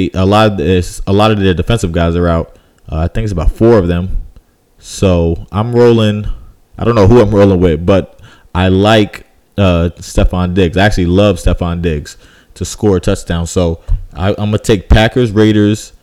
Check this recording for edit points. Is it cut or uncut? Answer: uncut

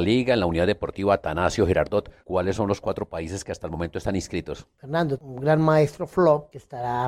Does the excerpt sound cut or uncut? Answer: cut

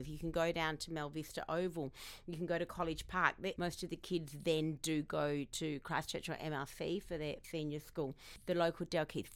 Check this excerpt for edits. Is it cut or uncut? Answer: cut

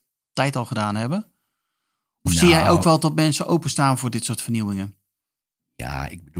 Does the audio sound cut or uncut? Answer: uncut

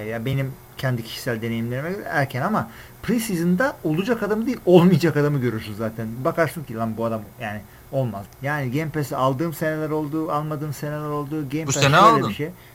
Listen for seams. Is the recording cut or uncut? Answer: cut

